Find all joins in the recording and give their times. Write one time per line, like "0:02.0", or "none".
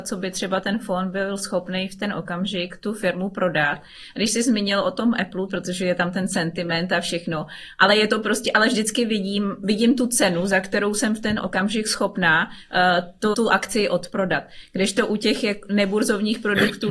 0:05.5
0:13.3